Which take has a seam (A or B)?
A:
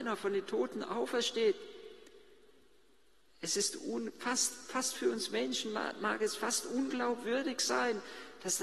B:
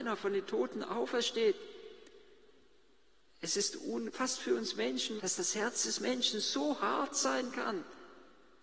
B